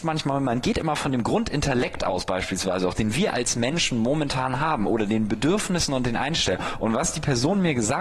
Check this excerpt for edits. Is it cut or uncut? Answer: cut